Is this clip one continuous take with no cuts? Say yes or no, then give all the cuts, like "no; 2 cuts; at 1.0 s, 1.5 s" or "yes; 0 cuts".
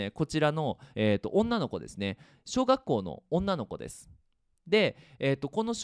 yes; 0 cuts